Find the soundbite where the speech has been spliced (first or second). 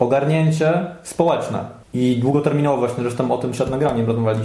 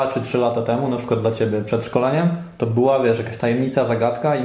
first